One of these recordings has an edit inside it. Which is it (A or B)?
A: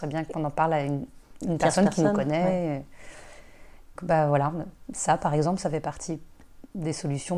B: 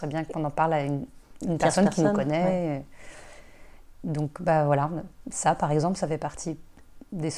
A